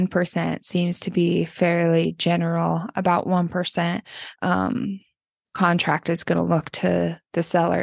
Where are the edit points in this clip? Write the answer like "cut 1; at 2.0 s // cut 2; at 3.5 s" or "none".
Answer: cut 1; at 4.4 s